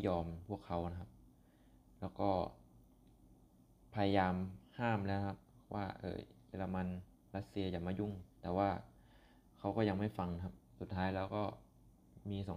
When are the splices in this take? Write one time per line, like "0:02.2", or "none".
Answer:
0:08.3